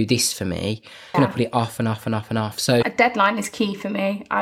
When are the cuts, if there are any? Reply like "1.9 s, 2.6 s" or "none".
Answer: 1.1 s, 2.8 s

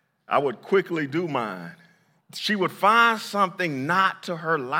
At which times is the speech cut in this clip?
2.2 s

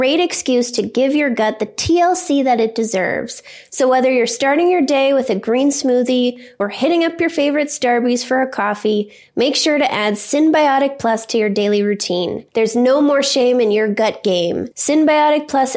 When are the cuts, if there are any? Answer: none

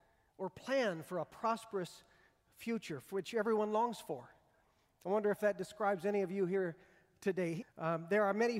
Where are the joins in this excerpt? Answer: 7.6 s

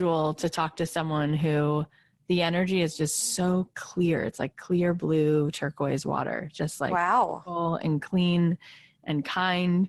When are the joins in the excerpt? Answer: none

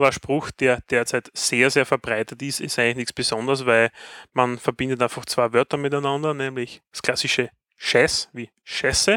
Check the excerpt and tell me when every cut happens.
none

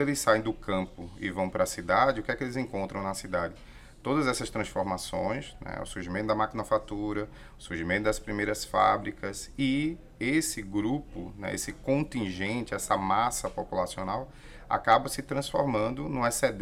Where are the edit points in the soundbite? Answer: none

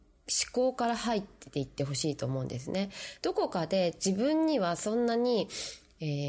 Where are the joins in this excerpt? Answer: none

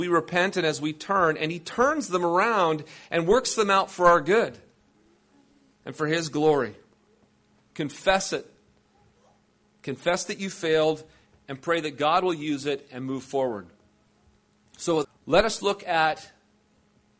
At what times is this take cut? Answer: 7.7 s, 15.0 s

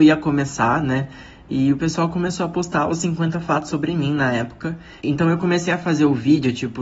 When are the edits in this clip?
5.0 s

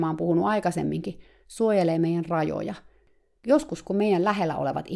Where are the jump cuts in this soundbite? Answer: none

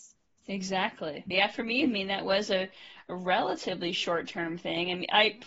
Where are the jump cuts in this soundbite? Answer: 1.3 s

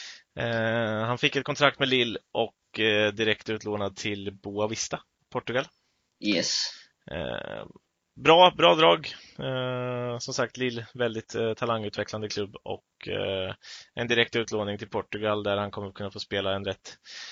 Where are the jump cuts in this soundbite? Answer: none

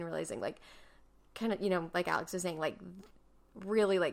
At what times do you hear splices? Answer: none

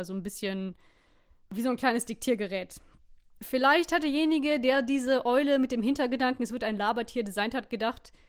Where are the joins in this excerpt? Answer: none

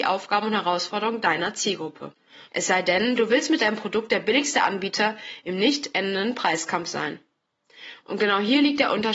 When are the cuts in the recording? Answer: 2.5 s, 8.0 s

